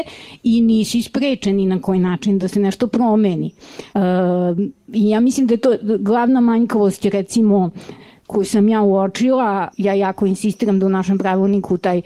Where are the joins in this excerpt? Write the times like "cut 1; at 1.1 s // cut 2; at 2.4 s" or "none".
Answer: cut 1; at 3.9 s // cut 2; at 9.7 s